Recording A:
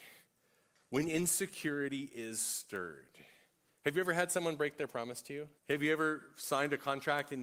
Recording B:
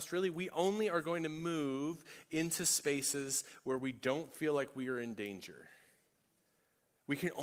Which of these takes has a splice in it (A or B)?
A